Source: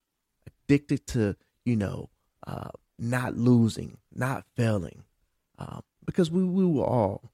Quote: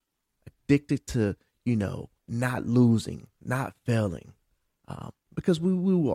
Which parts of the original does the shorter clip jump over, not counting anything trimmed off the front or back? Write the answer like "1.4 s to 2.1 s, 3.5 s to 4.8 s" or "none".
2.2 s to 2.9 s